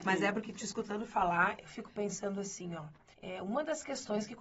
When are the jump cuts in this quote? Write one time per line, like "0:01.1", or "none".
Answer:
0:03.1